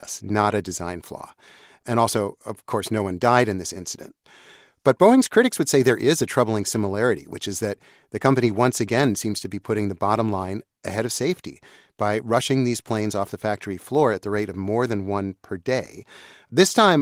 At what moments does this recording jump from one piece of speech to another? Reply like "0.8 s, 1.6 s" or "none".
none